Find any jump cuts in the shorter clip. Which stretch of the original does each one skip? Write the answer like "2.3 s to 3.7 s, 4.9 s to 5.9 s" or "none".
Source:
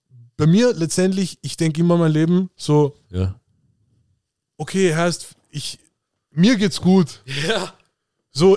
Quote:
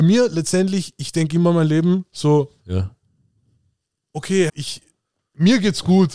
4.9 s to 5.5 s

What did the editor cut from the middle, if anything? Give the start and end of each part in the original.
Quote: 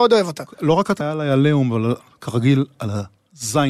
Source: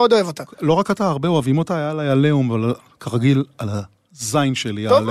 1.0 s to 1.8 s

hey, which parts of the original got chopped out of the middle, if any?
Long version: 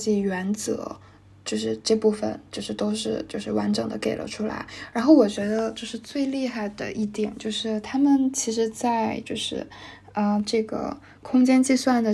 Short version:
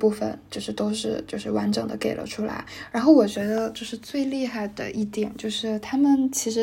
none

